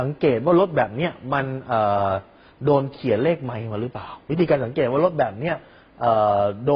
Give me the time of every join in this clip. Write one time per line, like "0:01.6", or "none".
none